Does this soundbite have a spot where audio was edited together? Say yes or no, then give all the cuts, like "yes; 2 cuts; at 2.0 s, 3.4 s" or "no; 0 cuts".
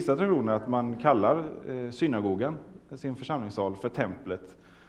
no; 0 cuts